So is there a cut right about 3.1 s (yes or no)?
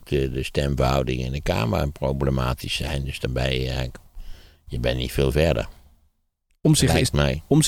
no